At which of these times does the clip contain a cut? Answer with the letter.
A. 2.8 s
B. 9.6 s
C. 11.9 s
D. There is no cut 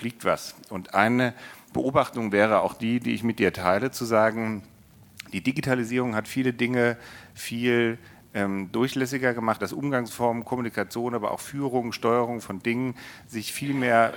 B